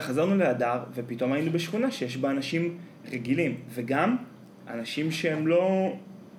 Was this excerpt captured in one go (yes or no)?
yes